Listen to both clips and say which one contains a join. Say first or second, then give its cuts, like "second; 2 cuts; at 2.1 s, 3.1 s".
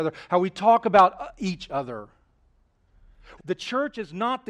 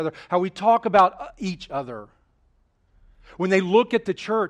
first; 1 cut; at 3.4 s